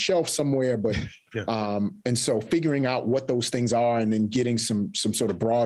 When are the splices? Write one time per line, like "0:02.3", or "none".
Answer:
0:01.3